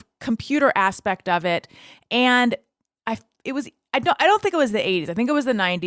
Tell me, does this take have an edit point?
no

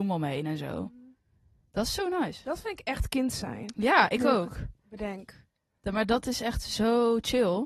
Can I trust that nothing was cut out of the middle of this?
yes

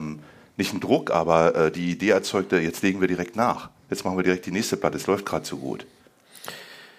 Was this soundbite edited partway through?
no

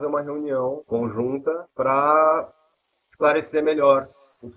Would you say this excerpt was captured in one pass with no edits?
no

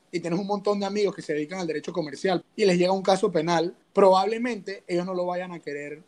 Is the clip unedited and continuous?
no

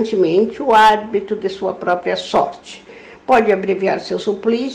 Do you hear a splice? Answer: no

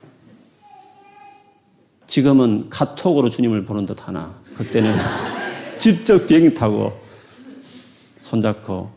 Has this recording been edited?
yes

